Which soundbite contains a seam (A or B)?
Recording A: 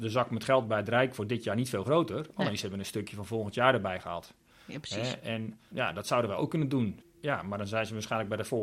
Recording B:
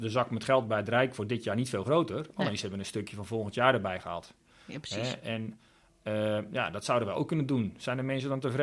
A